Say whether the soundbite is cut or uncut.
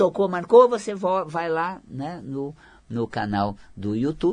uncut